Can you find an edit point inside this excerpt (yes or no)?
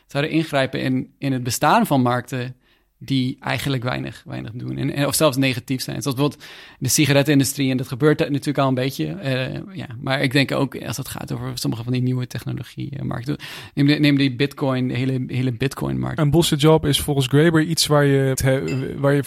yes